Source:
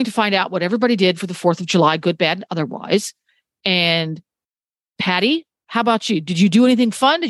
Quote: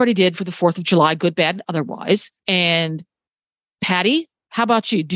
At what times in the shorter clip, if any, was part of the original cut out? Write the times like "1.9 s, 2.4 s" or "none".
2.4 s